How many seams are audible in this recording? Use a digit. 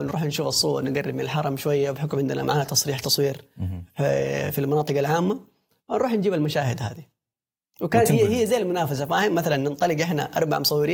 0